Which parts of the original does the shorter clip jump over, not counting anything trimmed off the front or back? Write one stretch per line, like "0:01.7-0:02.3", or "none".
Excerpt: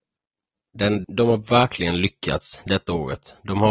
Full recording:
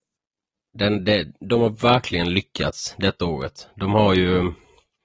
0:01.0-0:01.4